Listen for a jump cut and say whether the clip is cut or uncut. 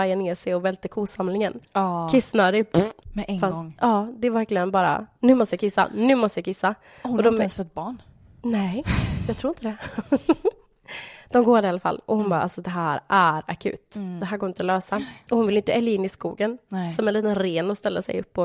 uncut